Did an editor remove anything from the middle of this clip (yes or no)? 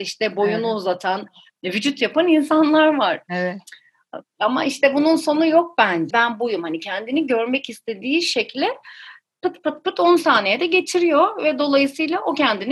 yes